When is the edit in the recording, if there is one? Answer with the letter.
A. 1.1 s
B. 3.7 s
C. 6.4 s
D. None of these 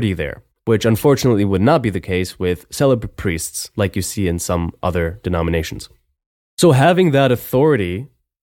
D